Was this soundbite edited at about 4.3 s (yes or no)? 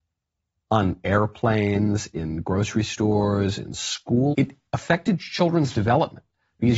yes